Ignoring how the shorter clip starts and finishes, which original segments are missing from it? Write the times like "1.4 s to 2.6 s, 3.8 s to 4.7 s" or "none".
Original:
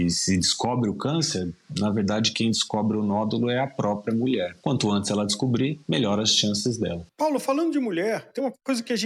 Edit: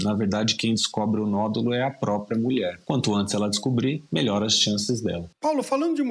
none